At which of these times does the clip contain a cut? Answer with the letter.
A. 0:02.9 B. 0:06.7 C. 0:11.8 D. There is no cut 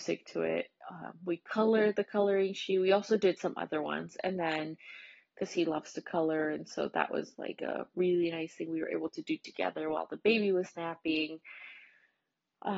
D